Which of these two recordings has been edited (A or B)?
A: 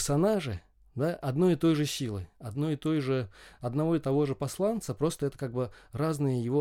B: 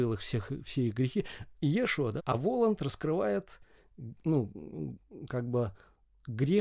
B